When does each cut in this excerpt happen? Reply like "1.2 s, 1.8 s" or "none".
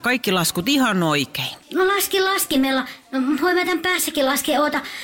1.6 s